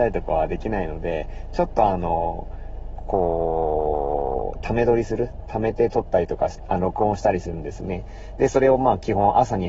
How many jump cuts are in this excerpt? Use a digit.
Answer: 0